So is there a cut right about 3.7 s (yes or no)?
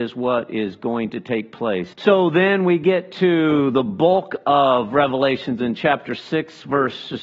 no